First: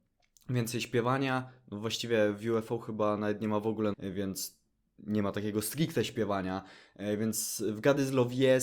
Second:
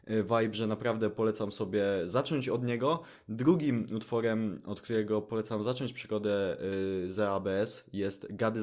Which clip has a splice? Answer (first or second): first